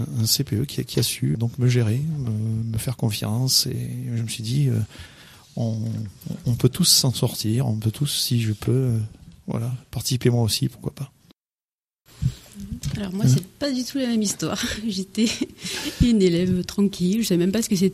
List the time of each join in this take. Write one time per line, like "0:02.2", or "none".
0:01.3